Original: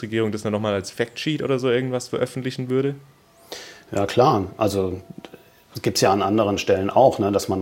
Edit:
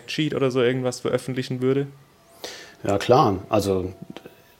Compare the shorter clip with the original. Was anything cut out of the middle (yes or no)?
no